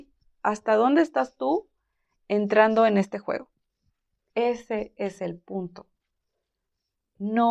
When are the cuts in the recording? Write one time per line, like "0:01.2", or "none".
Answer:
0:04.3